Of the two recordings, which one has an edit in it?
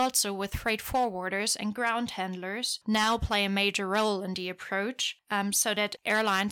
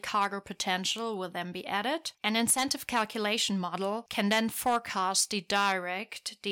second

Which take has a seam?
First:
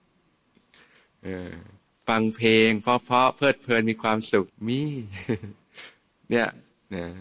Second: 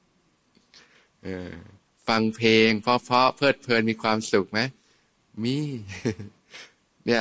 first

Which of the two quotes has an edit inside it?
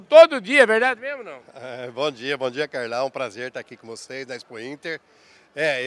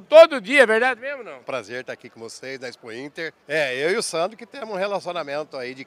second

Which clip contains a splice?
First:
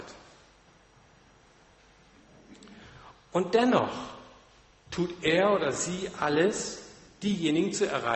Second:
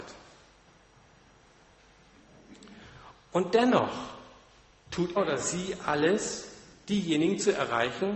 second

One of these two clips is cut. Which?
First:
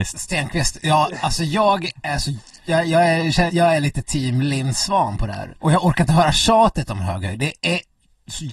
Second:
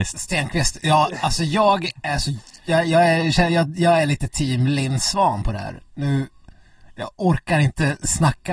first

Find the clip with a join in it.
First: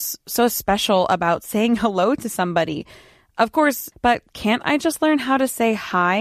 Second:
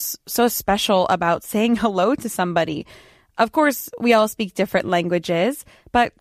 first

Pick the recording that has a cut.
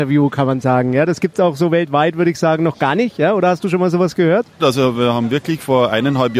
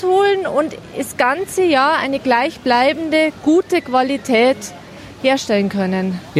first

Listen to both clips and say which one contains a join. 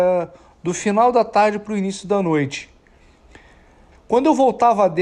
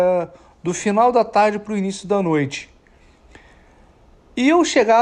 first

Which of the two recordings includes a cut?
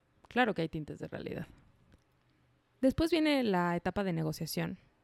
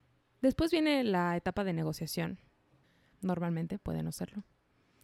second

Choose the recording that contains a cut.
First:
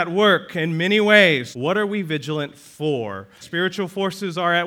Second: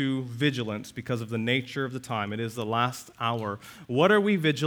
first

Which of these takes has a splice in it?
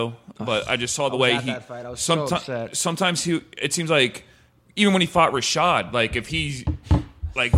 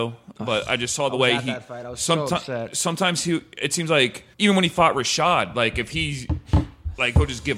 second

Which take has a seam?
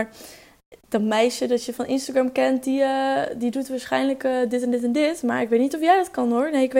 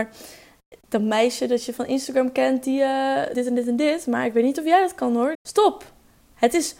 second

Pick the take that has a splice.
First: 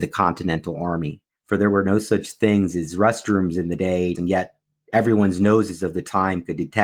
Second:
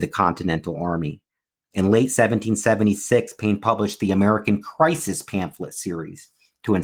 first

